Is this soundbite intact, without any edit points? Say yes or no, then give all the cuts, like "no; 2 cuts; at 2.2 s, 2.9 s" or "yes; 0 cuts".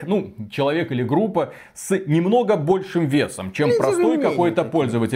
yes; 0 cuts